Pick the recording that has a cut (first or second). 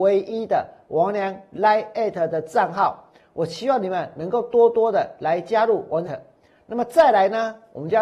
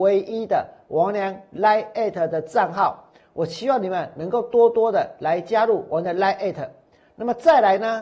first